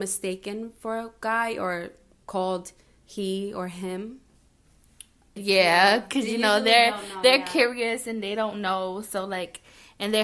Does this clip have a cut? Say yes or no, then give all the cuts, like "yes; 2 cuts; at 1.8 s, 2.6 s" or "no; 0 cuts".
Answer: yes; 1 cut; at 5.4 s